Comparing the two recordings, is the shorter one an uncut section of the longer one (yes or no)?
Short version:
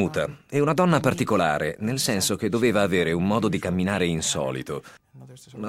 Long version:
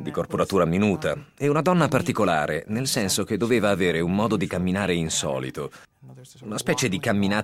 yes